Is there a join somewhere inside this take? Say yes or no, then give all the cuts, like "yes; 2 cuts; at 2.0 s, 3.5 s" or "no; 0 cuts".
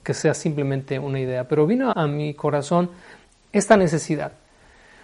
yes; 1 cut; at 1.9 s